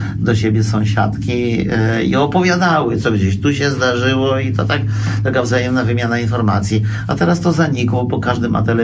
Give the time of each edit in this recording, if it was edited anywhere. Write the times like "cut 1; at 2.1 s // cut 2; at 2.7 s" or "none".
cut 1; at 3.0 s